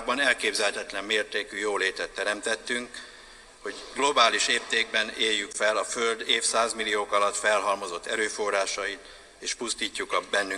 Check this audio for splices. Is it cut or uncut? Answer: cut